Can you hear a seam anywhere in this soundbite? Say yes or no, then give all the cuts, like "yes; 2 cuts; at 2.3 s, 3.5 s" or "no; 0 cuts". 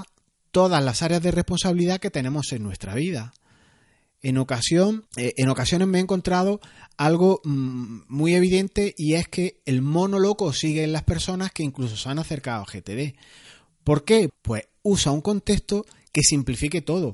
yes; 2 cuts; at 5.1 s, 14.3 s